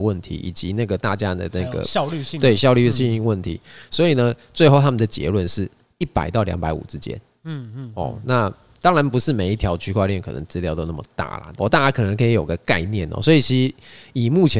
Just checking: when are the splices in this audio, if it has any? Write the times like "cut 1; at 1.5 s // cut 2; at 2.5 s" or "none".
cut 1; at 11.6 s